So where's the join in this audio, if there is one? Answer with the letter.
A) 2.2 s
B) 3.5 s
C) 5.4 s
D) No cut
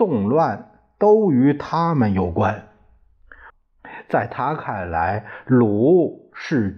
B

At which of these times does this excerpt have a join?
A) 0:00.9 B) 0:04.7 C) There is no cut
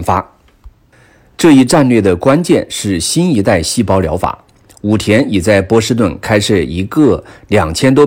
C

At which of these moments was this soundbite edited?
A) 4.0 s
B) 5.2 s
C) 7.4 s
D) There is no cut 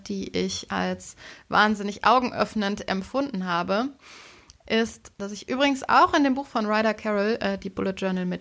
B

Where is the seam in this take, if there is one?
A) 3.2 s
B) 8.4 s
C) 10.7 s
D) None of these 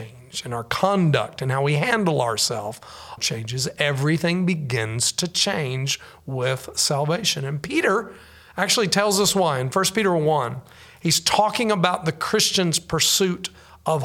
A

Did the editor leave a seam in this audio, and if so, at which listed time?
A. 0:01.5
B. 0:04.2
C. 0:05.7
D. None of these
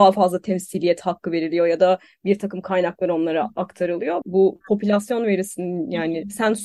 B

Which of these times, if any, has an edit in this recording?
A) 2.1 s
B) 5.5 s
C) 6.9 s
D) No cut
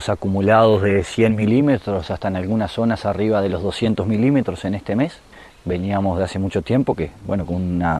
B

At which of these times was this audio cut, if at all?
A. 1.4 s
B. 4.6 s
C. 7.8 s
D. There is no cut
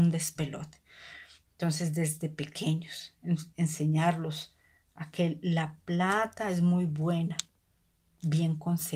D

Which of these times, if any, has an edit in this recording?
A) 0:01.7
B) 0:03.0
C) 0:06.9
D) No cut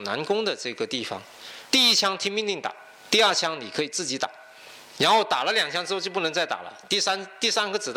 A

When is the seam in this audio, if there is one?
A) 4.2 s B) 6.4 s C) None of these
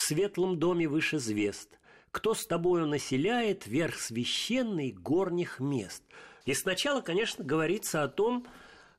B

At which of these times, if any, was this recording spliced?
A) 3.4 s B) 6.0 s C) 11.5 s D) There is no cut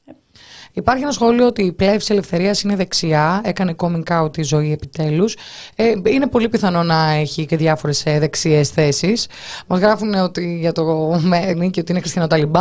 C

